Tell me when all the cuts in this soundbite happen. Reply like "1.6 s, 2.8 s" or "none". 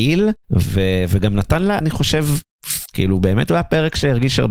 1.8 s, 2.9 s